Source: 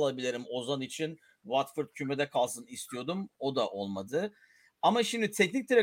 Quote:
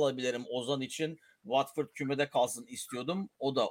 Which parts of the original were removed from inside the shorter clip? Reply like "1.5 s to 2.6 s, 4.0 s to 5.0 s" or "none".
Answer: none